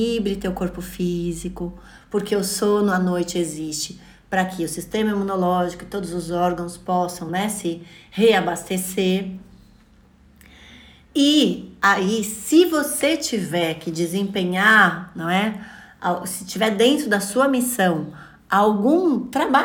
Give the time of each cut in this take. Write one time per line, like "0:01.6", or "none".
none